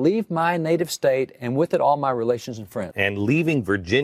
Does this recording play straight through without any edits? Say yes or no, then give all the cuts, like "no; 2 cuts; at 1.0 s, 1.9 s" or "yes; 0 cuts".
no; 1 cut; at 2.9 s